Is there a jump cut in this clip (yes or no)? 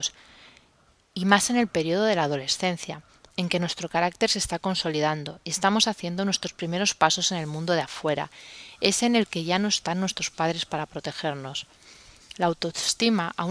no